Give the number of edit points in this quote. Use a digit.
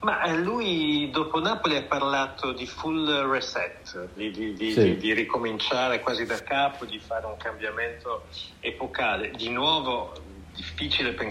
1